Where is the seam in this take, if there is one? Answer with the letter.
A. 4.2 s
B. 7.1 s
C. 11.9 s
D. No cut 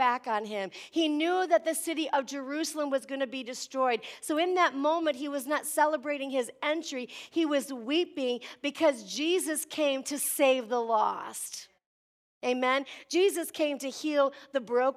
D